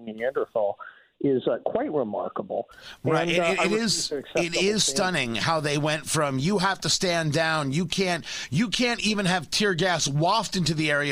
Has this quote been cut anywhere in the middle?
no; 0 cuts

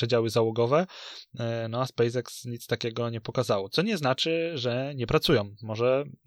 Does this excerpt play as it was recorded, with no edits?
yes; 0 cuts

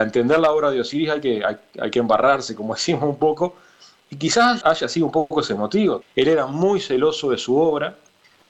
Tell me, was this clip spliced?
yes; 2 cuts; at 4.6 s, 6.0 s

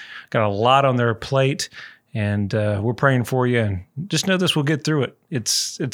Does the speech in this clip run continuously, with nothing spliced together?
yes; 0 cuts

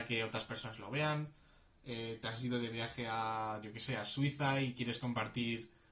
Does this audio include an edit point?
no; 0 cuts

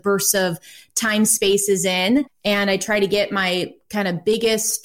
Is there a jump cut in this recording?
yes; 1 cut; at 2.3 s

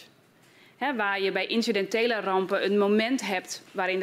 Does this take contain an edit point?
no; 0 cuts

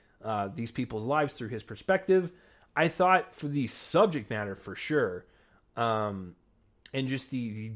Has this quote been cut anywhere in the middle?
no; 0 cuts

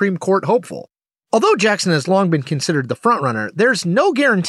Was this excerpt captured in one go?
yes; 0 cuts

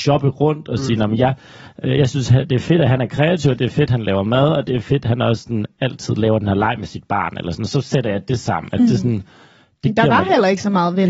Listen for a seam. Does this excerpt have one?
no; 0 cuts

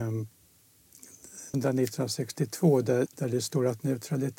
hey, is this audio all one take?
no; 2 cuts; at 1.5 s, 3.1 s

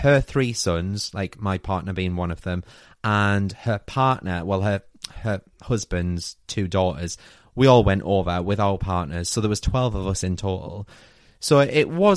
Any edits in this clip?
no; 0 cuts

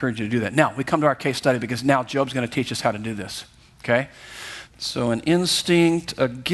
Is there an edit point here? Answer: yes; 1 cut; at 4.7 s

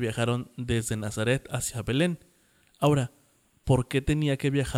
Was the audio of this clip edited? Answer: no; 0 cuts

